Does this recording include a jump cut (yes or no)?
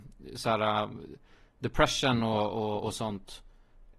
no